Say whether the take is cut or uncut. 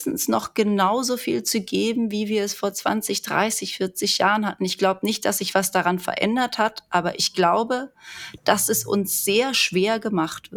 uncut